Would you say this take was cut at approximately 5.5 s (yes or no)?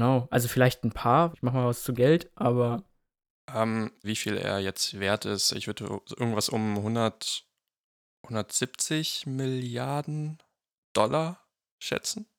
no